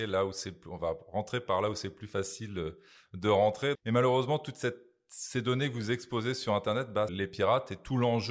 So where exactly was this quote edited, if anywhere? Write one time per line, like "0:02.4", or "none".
0:03.7
0:07.1